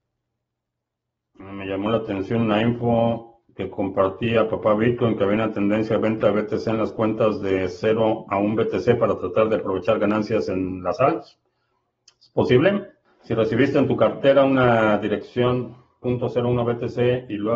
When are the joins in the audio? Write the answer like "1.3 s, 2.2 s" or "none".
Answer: 1.3 s, 16.0 s